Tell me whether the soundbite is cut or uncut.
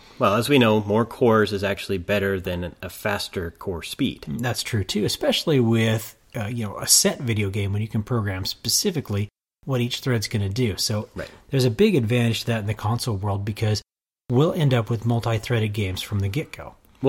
uncut